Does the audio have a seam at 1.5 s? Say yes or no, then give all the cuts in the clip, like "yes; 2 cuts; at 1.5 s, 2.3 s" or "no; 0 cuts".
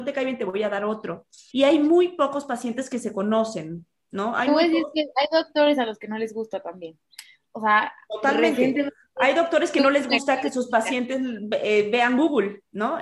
yes; 1 cut; at 1.5 s